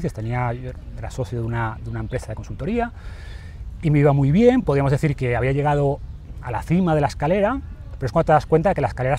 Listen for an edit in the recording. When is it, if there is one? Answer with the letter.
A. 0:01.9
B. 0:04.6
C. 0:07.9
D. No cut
D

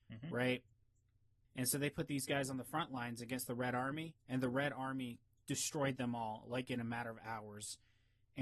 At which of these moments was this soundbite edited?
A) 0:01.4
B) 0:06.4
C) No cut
A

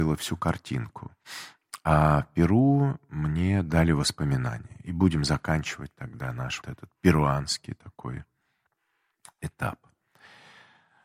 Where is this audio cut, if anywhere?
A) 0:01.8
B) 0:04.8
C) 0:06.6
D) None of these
C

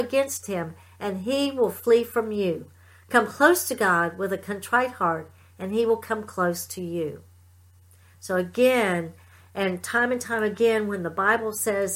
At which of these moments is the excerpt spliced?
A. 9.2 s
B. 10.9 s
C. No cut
C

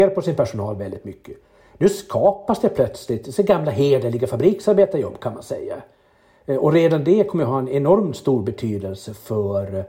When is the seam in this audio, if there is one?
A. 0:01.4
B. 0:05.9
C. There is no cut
C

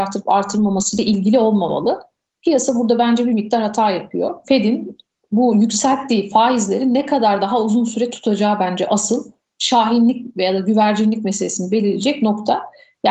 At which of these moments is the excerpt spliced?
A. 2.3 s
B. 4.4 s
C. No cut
B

